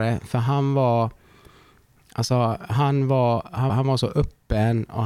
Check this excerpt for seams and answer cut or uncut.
cut